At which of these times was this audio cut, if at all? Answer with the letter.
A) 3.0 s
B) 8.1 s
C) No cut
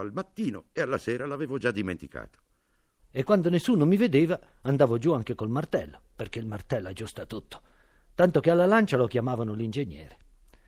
A